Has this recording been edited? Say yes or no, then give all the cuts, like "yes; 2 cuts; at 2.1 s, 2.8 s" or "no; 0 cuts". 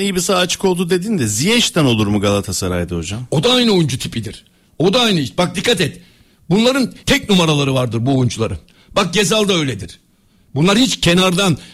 yes; 1 cut; at 7.0 s